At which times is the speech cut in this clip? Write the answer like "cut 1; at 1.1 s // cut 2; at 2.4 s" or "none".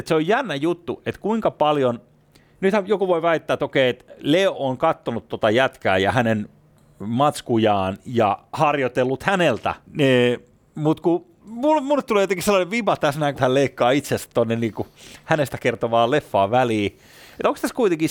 cut 1; at 9.9 s // cut 2; at 11.4 s // cut 3; at 13.3 s